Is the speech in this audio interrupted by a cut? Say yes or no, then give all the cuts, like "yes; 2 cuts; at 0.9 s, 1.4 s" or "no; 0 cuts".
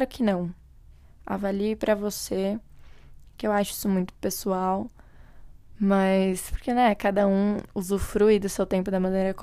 no; 0 cuts